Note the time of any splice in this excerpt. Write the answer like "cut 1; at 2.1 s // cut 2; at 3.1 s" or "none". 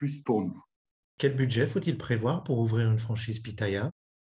none